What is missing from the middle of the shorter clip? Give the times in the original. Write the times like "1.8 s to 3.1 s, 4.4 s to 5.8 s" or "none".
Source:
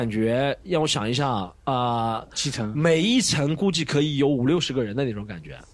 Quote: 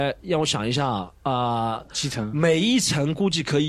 none